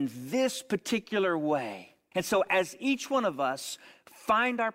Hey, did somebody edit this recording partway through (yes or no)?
yes